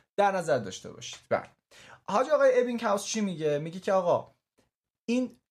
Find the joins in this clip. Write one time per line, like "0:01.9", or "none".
none